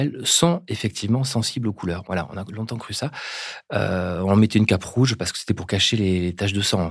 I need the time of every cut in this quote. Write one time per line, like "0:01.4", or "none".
0:02.0